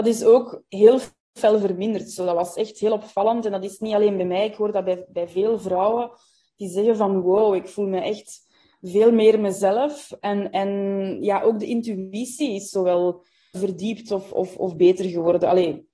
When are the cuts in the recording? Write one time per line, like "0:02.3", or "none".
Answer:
none